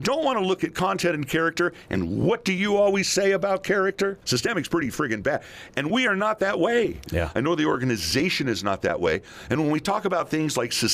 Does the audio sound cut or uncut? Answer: cut